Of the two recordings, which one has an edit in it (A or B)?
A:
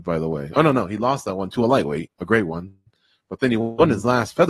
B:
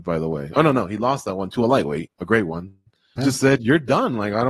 B